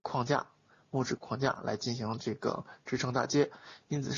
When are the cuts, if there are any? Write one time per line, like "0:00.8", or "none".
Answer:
0:01.2